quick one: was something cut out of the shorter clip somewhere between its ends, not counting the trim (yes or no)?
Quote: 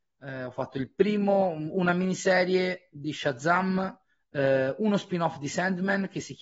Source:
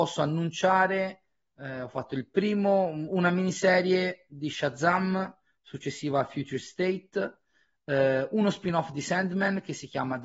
yes